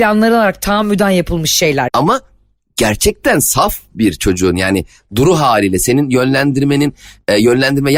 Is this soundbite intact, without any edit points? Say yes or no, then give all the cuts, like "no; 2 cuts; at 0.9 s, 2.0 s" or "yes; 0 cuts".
no; 1 cut; at 1.9 s